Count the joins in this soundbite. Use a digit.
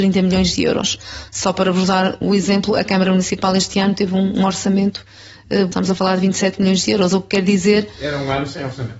2